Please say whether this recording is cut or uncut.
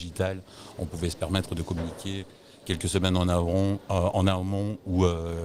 uncut